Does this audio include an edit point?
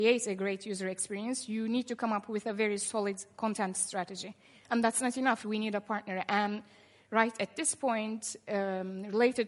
yes; 1 cut; at 5.4 s

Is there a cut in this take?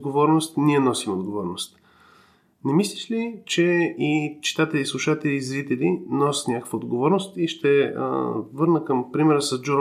no; 0 cuts

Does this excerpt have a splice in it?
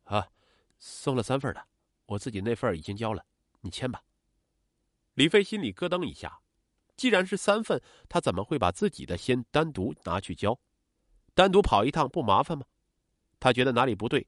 no; 0 cuts

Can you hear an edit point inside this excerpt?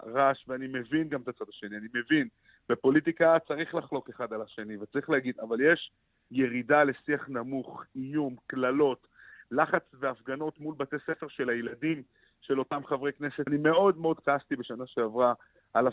yes; 1 cut; at 13.5 s

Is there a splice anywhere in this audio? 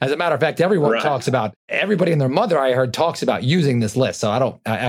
no; 0 cuts

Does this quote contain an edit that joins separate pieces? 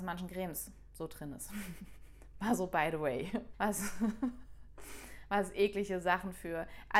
yes; 1 cut; at 3.5 s

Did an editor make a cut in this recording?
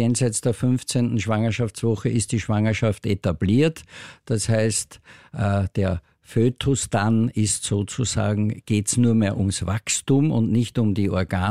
no; 0 cuts

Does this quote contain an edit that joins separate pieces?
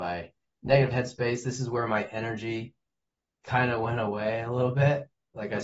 no; 0 cuts

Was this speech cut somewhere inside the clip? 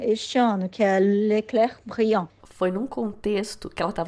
yes; 1 cut; at 2.4 s

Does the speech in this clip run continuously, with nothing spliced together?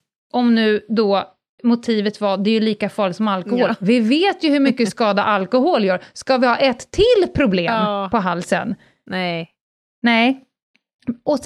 yes; 0 cuts

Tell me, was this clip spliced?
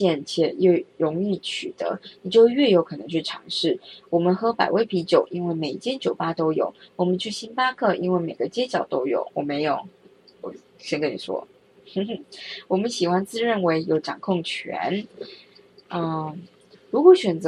no; 0 cuts

